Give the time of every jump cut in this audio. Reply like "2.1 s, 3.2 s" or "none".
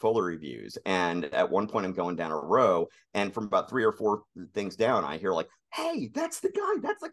none

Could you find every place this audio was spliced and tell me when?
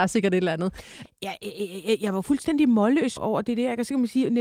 1.0 s, 3.2 s

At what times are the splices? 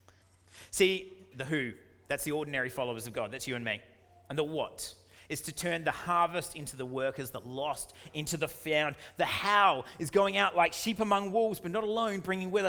1.3 s

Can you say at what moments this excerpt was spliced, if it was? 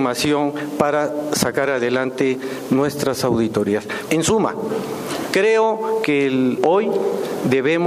4.1 s, 6.6 s

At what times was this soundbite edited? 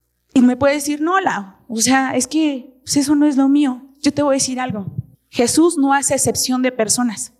5.1 s

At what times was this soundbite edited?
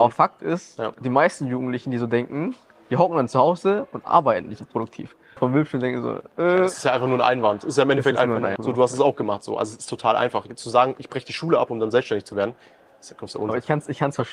5.4 s, 8.6 s

